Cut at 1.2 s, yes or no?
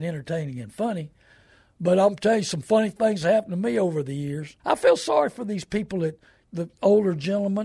no